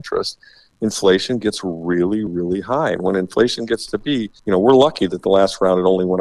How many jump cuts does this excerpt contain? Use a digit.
2